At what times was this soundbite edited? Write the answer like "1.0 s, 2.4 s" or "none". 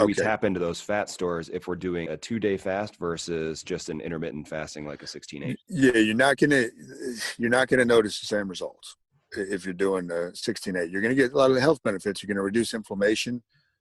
2.1 s